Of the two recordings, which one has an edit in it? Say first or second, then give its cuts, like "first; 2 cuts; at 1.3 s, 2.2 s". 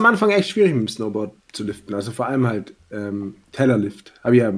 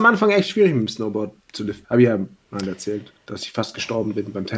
second; 1 cut; at 1.8 s